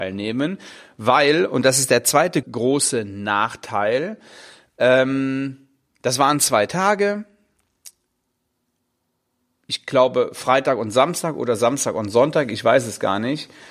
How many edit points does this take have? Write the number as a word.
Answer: one